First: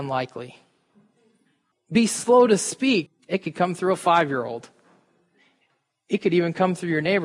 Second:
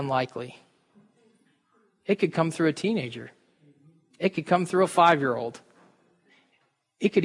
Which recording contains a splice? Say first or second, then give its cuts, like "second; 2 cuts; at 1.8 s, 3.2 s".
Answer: first; 2 cuts; at 1.7 s, 3.1 s